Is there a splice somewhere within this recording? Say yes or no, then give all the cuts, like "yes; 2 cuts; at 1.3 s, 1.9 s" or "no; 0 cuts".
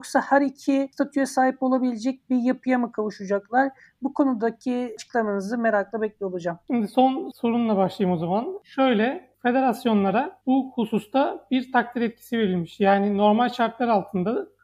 no; 0 cuts